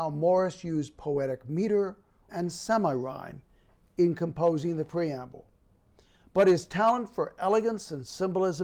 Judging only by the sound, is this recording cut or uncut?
cut